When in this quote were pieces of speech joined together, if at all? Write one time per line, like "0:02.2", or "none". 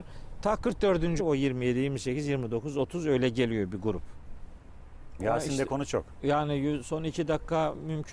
0:01.2
0:05.2